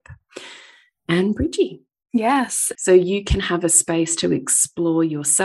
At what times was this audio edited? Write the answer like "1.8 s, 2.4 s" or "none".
2.7 s